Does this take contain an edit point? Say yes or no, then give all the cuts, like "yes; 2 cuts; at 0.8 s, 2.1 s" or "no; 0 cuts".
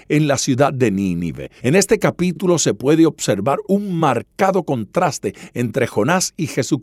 yes; 1 cut; at 1.6 s